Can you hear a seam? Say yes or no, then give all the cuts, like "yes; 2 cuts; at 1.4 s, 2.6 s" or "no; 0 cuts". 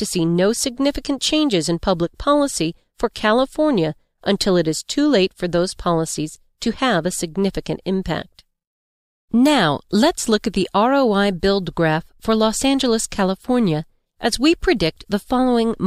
no; 0 cuts